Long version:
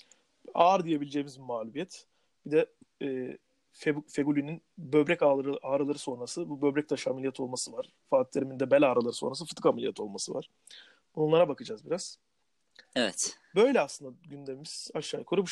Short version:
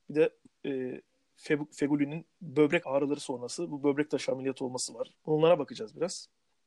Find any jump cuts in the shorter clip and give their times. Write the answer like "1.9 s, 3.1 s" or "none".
2.8 s, 5.1 s